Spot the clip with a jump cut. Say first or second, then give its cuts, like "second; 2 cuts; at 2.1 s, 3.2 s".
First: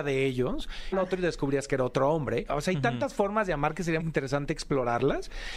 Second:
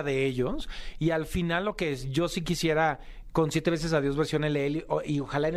first; 3 cuts; at 0.9 s, 2.5 s, 4.0 s